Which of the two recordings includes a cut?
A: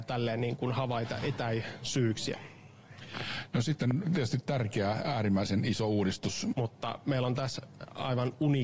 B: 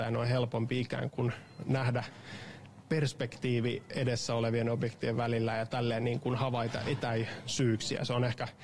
A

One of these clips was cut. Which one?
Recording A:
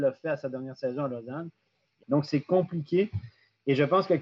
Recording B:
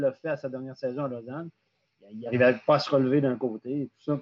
A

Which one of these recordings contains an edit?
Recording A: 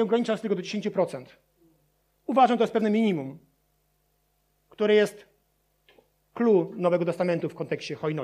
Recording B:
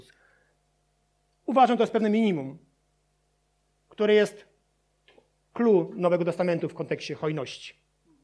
B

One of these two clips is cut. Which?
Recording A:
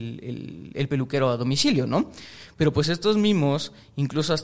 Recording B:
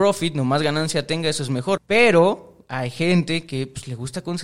B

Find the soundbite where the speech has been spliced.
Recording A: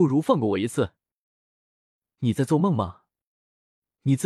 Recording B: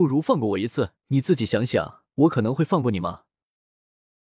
B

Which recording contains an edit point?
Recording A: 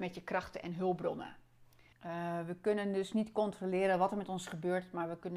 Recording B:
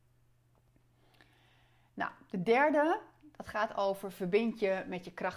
A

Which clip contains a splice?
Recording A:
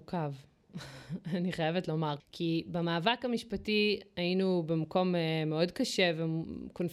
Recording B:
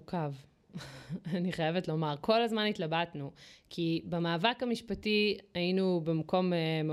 A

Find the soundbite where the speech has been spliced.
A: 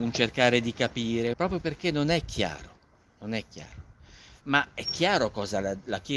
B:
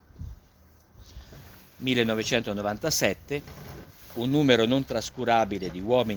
A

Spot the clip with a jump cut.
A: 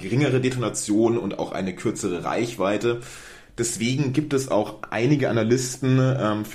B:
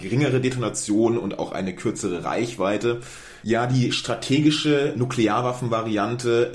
B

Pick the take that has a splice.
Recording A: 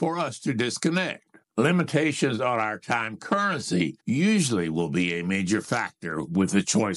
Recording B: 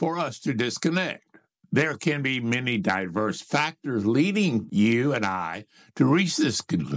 A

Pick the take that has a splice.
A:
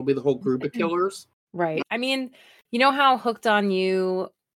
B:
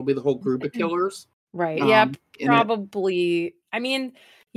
A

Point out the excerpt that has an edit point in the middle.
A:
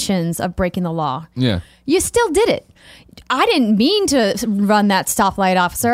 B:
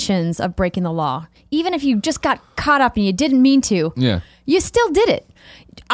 A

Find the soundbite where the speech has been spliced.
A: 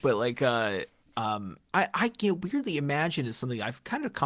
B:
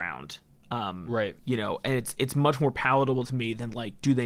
B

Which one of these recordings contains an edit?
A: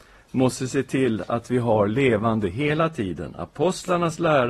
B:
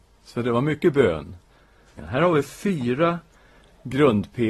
B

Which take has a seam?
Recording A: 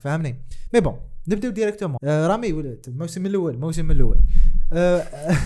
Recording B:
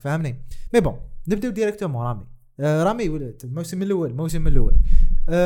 A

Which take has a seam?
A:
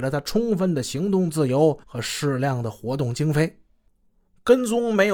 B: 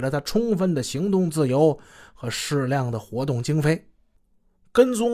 A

